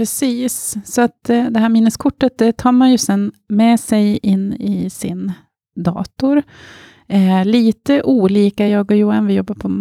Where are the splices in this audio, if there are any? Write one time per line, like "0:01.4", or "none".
none